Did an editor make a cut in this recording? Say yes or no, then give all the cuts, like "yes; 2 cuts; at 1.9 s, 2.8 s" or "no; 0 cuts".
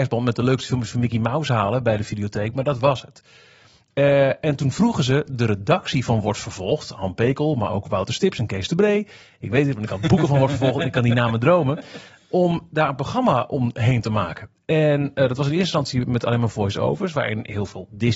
no; 0 cuts